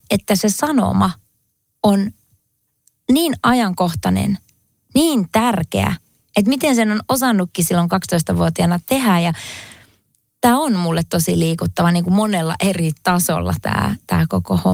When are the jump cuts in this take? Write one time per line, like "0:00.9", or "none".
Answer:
none